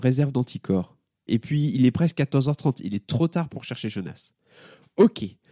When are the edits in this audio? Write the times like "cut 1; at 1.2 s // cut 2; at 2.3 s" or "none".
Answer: cut 1; at 1.3 s